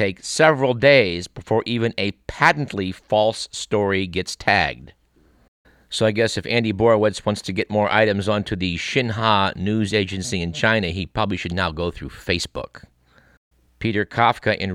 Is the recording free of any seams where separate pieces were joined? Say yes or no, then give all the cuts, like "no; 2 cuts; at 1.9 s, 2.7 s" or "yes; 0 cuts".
no; 1 cut; at 13.7 s